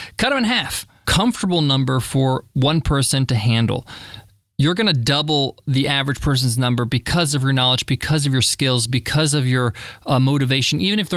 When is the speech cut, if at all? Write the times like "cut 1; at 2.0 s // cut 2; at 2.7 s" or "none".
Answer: cut 1; at 1.0 s